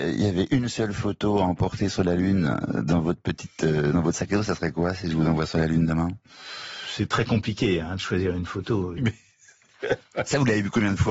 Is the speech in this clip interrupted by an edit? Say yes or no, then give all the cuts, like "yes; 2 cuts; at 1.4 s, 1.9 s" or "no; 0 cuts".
yes; 1 cut; at 9.0 s